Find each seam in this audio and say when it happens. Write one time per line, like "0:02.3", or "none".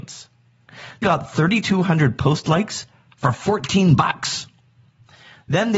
0:01.0